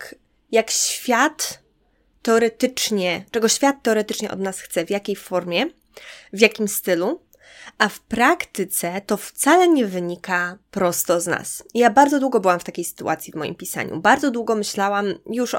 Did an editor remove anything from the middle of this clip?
no; 0 cuts

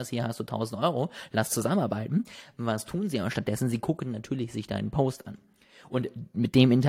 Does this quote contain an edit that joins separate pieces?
no; 0 cuts

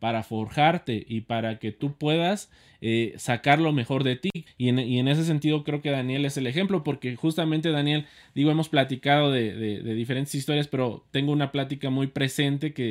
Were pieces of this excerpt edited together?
yes; 1 cut; at 4.5 s

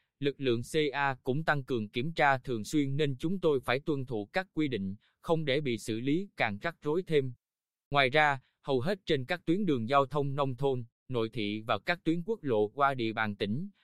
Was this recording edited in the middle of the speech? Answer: no; 0 cuts

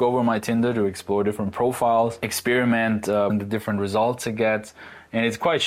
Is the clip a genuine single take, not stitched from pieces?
no; 1 cut; at 3.3 s

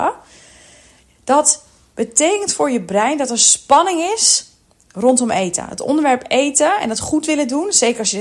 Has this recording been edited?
no; 0 cuts

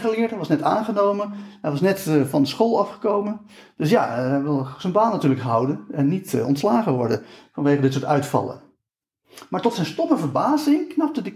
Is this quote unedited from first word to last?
yes; 0 cuts

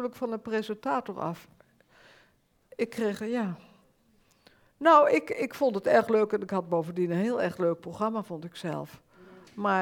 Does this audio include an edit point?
no; 0 cuts

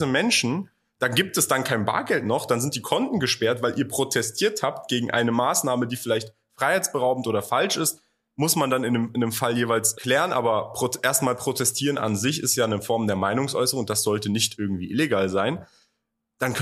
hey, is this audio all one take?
no; 1 cut; at 9.9 s

